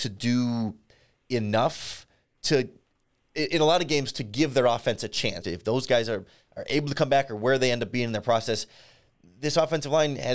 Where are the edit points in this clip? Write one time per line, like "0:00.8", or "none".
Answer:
0:05.4